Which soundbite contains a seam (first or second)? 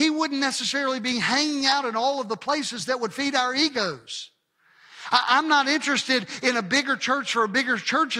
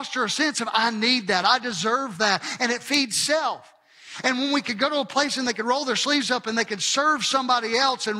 second